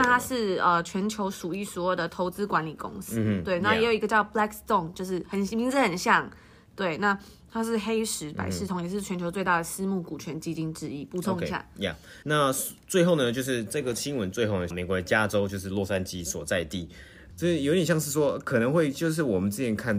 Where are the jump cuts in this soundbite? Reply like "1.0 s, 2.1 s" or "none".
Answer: 12.2 s, 14.7 s, 17.3 s